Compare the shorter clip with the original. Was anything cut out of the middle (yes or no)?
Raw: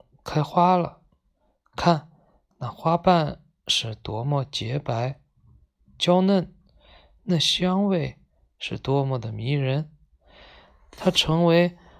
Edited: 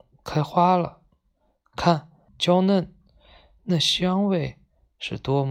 yes